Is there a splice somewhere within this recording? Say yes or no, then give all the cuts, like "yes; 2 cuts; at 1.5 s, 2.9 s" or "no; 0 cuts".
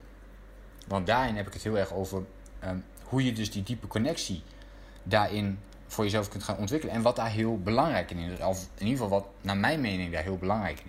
no; 0 cuts